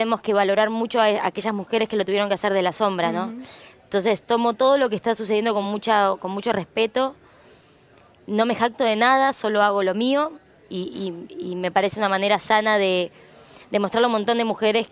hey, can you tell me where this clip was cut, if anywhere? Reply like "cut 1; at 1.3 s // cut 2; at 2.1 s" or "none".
none